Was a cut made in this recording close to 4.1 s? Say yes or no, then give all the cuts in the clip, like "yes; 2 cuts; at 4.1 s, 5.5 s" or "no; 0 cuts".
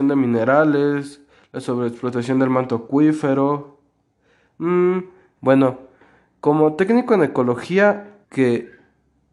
no; 2 cuts; at 5.4 s, 8.2 s